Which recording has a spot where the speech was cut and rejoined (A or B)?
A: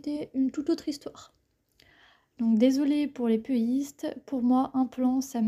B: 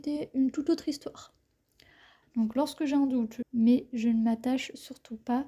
B